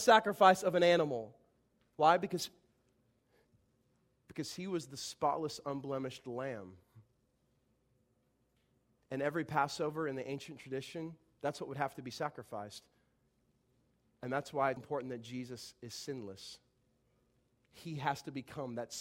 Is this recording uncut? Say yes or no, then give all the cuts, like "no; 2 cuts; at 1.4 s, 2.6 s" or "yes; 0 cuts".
no; 1 cut; at 14.8 s